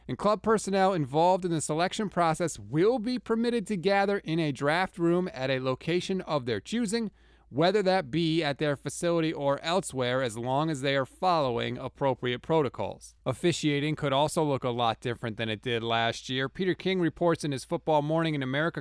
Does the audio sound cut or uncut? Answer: cut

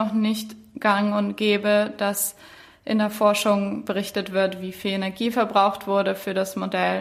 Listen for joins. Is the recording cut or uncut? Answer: uncut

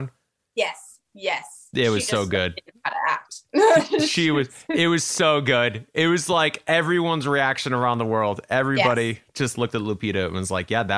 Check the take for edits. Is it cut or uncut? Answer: uncut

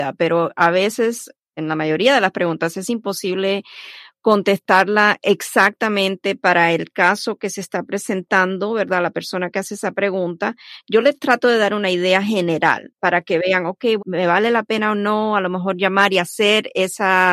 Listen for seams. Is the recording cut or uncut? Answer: cut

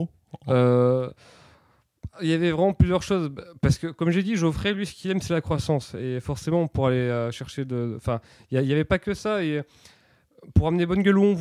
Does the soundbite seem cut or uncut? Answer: uncut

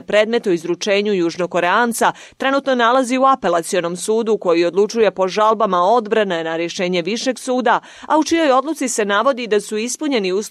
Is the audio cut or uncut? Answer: uncut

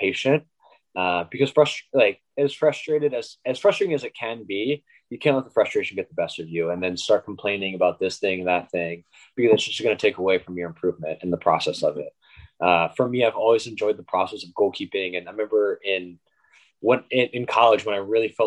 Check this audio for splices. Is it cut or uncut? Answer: uncut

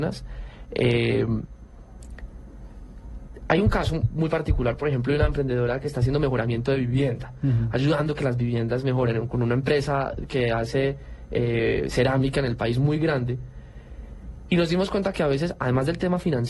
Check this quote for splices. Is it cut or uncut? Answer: cut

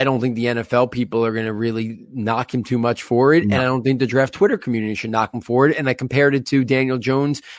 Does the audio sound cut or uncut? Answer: uncut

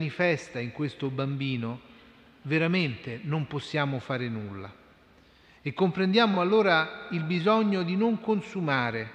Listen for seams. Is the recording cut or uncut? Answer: uncut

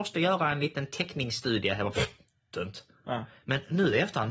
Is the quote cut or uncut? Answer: uncut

